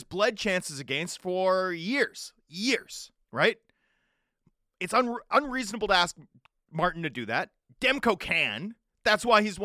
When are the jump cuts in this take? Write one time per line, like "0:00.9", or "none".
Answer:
0:03.2